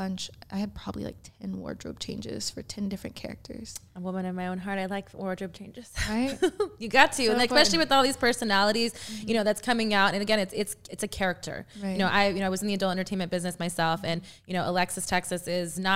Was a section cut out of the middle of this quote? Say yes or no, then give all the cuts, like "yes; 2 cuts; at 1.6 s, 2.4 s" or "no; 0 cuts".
no; 0 cuts